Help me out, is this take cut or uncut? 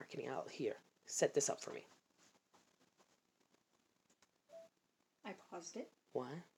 uncut